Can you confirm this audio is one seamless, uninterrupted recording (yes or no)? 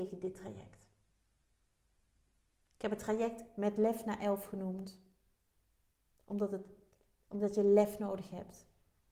yes